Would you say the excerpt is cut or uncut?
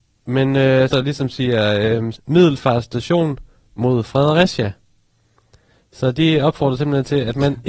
cut